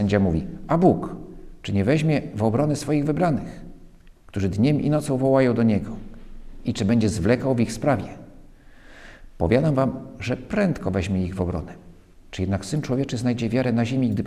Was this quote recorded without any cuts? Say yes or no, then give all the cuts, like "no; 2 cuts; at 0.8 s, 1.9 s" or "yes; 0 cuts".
yes; 0 cuts